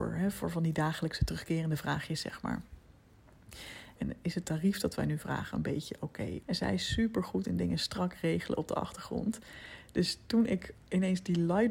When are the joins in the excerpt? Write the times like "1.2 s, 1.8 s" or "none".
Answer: 4.0 s, 6.4 s